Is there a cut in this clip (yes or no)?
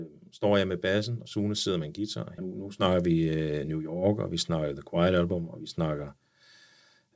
yes